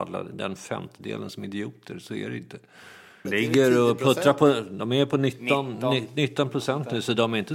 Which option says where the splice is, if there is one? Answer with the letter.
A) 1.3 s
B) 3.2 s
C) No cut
B